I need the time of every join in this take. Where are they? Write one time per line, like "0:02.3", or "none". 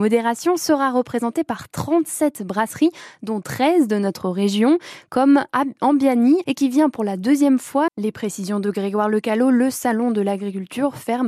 0:06.4
0:07.9